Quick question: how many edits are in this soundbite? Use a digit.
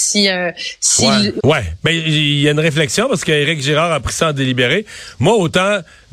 1